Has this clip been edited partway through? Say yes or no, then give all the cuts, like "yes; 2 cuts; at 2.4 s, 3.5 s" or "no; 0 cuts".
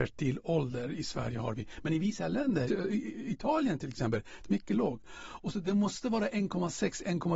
yes; 2 cuts; at 2.7 s, 4.4 s